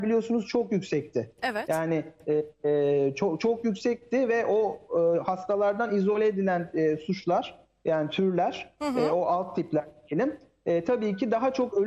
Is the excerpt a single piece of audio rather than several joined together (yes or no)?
yes